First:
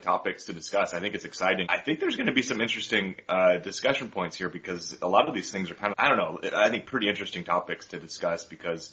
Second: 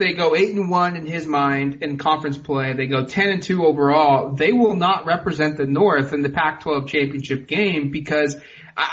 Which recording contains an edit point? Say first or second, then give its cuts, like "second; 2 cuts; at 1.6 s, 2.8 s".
first; 2 cuts; at 1.6 s, 5.9 s